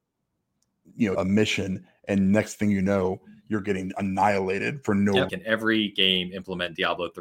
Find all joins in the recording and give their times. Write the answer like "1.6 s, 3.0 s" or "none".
1.1 s, 5.3 s